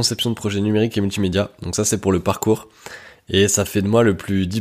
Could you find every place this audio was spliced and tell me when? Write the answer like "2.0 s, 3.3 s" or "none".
none